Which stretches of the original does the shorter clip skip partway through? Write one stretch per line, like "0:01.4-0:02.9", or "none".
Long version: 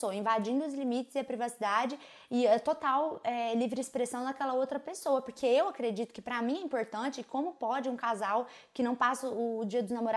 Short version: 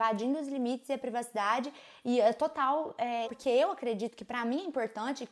0:03.5-0:05.2

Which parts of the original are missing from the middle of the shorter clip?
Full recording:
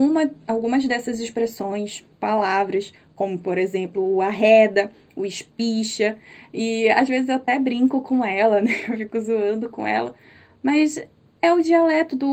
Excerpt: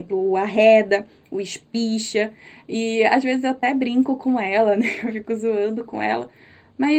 none

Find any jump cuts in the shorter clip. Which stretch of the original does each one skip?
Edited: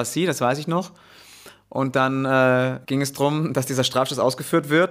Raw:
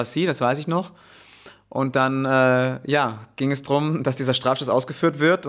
0:02.8-0:03.3

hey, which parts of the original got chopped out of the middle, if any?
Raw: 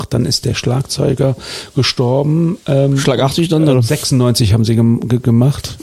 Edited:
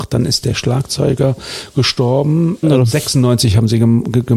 0:02.6-0:03.6

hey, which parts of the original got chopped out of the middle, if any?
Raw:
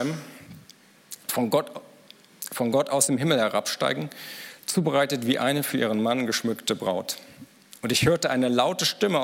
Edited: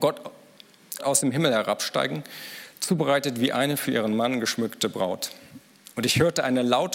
0:02.5-0:02.8

